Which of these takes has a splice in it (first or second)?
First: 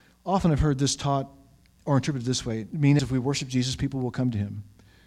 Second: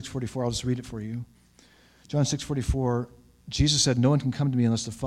first